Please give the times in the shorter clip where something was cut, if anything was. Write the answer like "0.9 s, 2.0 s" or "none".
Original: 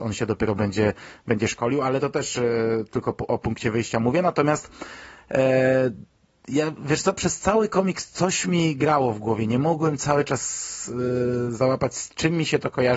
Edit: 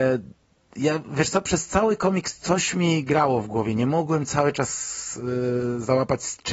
none